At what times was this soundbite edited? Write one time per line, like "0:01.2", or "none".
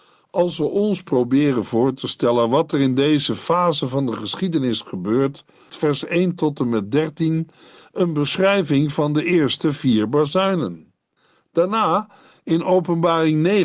0:05.7